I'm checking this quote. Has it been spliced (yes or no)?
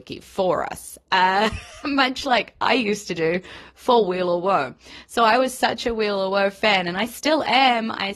no